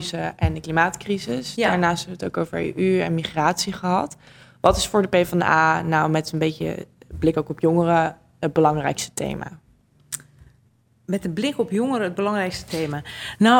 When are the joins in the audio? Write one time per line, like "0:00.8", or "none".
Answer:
none